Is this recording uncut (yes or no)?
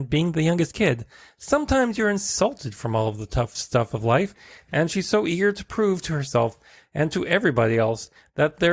yes